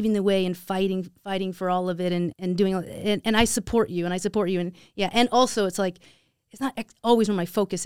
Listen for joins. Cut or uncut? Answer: cut